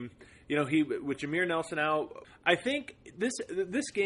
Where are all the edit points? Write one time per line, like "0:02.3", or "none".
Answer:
0:02.2